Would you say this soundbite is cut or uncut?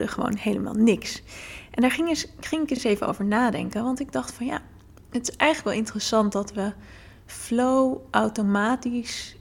uncut